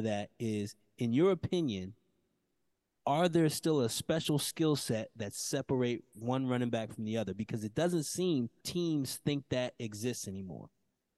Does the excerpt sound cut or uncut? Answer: cut